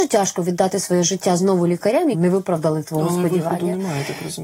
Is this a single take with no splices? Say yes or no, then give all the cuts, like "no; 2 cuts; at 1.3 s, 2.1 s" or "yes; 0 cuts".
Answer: no; 1 cut; at 2.1 s